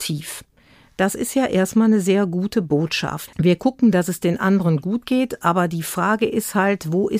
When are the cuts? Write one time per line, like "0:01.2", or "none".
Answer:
0:03.3